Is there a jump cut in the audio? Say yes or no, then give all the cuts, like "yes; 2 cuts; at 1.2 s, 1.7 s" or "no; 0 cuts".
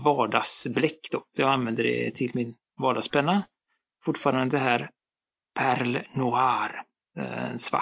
no; 0 cuts